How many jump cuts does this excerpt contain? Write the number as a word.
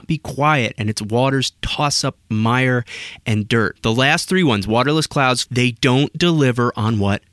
two